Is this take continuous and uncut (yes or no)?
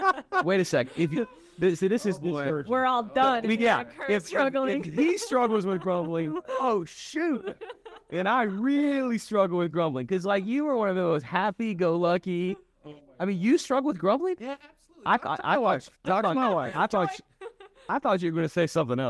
yes